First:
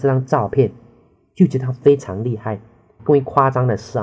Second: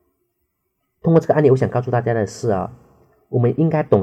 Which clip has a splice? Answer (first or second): first